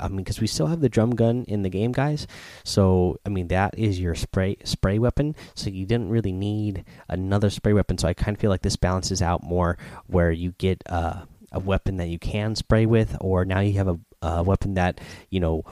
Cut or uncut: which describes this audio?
uncut